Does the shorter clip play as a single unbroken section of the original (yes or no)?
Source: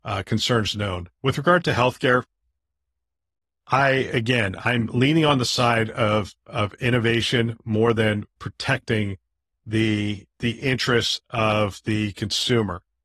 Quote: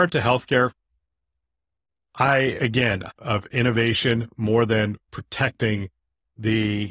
no